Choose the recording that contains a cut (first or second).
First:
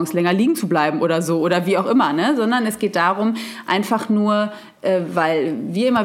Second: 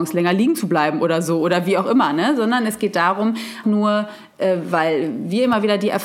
second